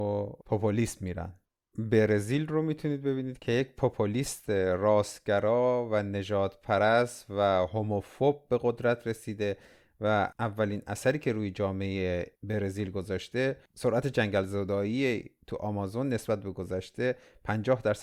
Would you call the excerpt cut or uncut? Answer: uncut